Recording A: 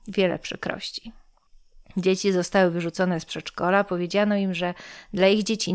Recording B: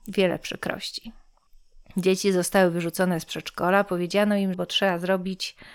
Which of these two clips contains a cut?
B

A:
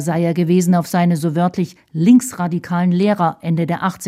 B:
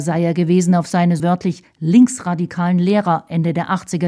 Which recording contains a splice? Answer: B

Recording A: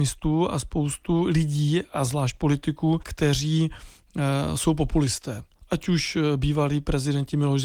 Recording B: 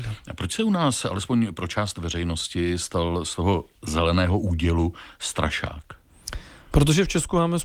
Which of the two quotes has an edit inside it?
A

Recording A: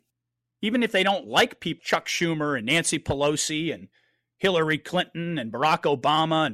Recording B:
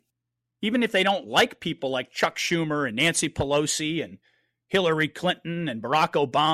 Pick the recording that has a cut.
A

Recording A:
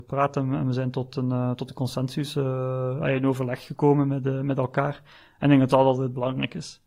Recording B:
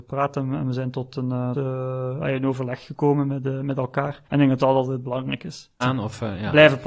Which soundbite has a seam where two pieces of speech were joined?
B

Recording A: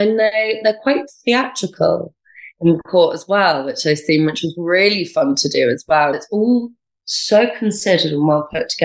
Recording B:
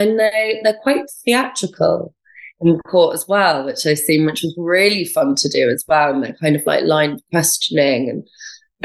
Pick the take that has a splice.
A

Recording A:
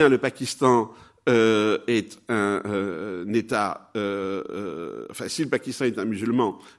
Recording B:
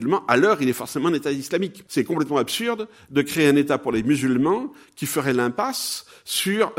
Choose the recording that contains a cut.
B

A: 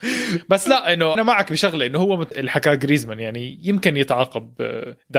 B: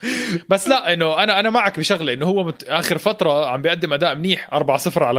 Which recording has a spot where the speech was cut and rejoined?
A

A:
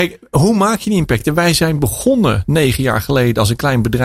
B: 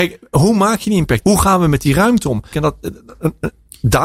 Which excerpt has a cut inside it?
B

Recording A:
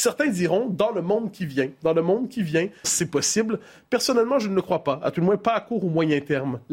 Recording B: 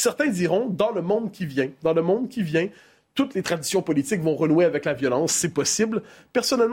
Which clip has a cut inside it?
A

